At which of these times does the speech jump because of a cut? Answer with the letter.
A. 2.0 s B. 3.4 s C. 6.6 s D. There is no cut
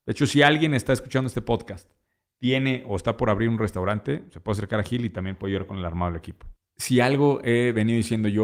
C